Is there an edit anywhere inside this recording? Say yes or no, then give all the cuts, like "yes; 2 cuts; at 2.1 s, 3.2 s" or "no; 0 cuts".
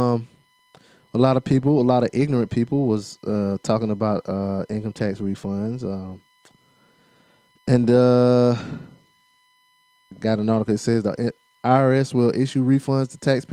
yes; 1 cut; at 10.1 s